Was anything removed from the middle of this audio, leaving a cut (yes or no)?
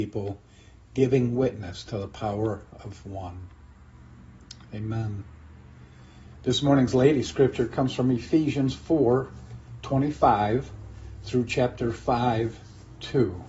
no